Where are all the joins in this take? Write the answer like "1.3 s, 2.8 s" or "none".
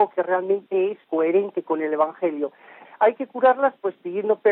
2.8 s